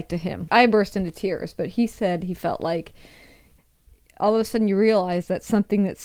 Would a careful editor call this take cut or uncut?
uncut